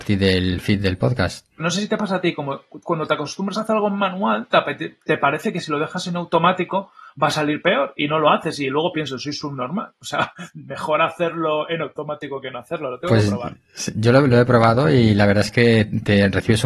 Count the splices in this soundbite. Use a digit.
1